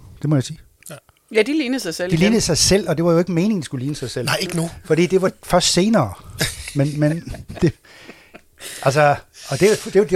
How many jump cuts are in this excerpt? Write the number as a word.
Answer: zero